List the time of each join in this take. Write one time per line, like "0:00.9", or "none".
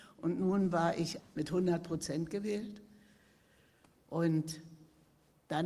0:01.2